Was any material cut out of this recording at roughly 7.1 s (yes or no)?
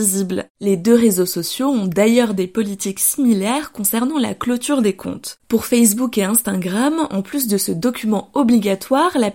no